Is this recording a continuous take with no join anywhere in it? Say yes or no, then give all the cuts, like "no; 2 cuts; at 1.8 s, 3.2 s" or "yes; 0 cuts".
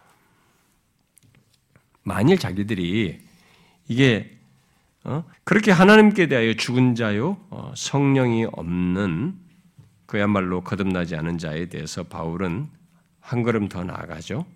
no; 1 cut; at 5.3 s